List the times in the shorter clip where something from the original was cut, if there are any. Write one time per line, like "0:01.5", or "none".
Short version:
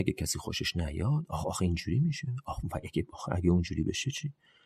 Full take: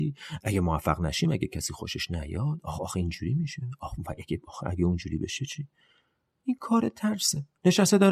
none